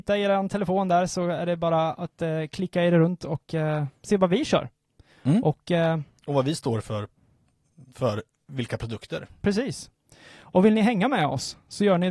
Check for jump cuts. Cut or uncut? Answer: uncut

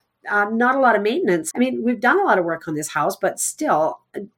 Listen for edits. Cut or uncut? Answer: cut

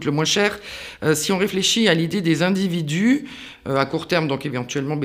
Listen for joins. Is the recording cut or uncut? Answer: uncut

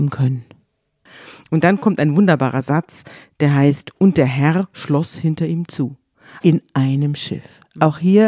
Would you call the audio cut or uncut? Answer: cut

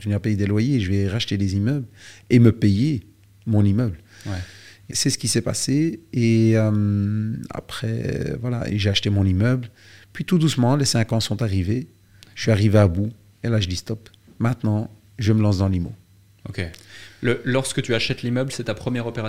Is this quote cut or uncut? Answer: cut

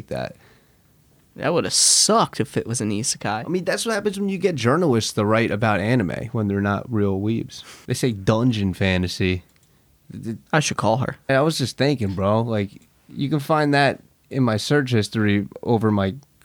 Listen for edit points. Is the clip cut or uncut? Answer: cut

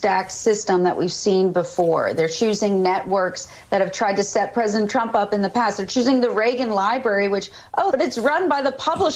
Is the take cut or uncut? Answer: cut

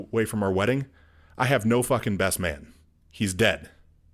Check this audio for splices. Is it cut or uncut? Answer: uncut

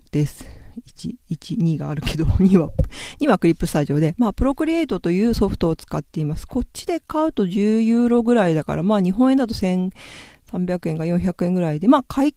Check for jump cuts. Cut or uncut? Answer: uncut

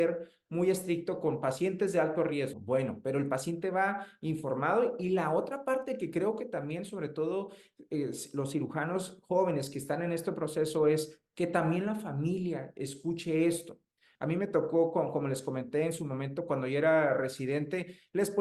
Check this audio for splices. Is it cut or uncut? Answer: cut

